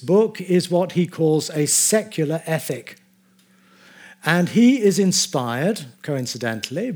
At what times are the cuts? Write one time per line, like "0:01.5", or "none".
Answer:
0:05.9